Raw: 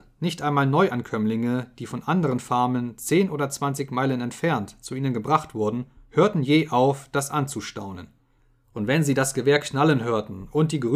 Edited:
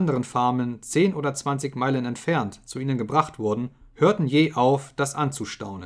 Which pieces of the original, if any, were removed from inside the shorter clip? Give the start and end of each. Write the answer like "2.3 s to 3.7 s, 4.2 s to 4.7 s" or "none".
none